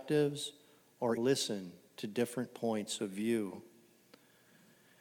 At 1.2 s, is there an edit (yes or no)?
yes